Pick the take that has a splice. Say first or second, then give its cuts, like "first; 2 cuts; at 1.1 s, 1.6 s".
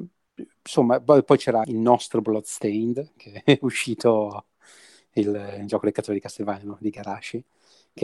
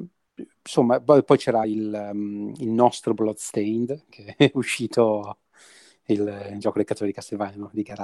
first; 1 cut; at 1.6 s